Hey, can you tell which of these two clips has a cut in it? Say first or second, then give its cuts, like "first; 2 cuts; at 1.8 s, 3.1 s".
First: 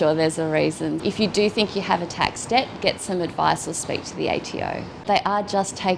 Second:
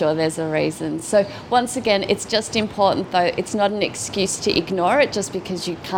first; 2 cuts; at 1.0 s, 5.0 s